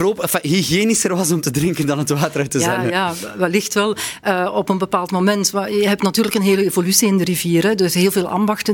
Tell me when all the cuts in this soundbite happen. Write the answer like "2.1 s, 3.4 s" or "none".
none

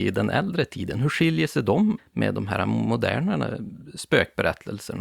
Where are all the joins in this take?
2.0 s

